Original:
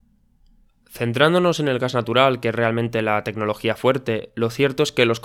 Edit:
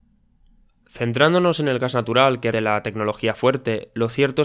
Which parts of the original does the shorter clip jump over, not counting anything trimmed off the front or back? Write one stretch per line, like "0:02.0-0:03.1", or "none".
0:02.5-0:02.9